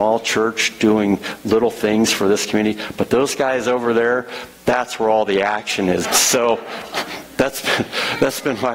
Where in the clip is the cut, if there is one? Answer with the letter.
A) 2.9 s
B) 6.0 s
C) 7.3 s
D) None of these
B